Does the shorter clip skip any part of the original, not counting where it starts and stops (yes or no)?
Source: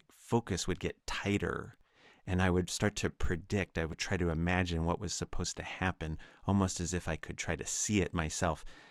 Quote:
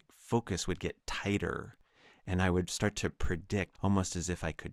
yes